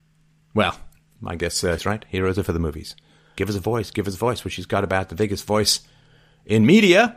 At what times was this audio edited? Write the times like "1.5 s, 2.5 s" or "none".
1.8 s, 3.4 s